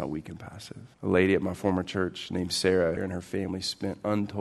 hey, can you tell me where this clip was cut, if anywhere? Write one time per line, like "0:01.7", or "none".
0:00.9
0:03.0